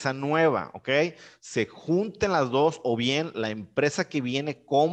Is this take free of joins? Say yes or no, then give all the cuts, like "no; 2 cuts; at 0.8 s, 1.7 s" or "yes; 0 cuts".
yes; 0 cuts